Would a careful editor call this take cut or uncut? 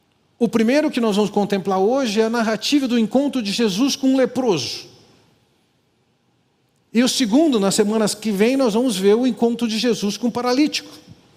uncut